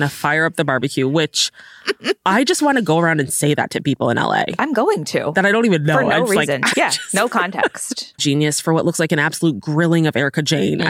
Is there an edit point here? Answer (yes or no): yes